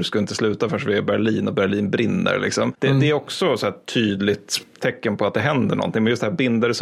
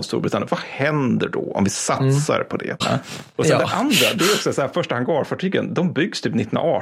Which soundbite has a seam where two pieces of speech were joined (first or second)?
second